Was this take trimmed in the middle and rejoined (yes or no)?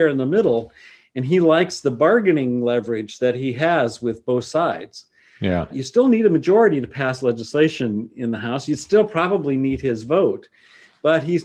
yes